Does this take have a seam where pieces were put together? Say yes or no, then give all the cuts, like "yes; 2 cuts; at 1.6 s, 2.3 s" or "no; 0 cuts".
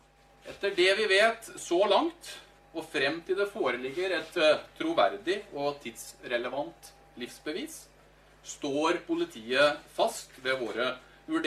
no; 0 cuts